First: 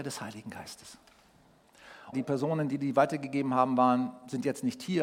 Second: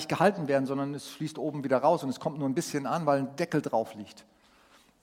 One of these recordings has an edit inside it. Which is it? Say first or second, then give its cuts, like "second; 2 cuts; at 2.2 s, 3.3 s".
first; 1 cut; at 2.1 s